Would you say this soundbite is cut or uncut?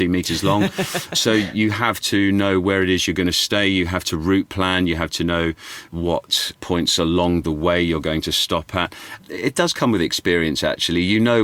uncut